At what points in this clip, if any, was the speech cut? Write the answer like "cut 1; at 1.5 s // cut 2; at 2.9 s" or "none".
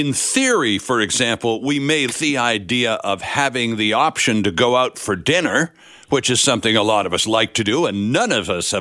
cut 1; at 2.1 s